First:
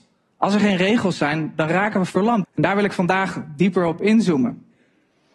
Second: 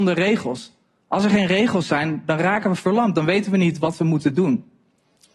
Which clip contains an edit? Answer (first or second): first